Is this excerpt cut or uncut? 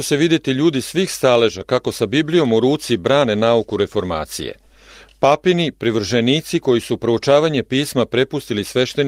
uncut